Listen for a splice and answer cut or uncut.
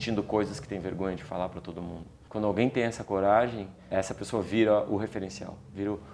uncut